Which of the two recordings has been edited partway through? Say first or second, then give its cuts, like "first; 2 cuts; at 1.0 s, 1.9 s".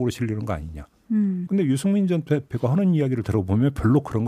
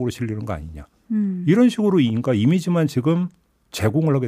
first; 1 cut; at 1.4 s